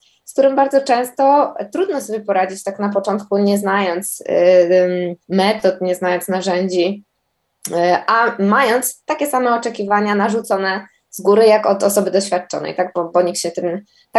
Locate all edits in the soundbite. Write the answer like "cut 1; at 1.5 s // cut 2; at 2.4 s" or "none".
none